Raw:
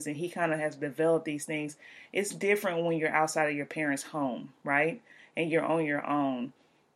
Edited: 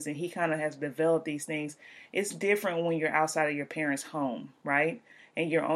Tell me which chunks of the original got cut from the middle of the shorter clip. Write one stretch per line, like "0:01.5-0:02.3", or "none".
none